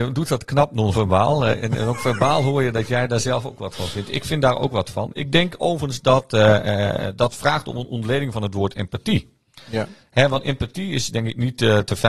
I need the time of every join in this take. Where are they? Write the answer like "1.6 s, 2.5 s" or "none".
none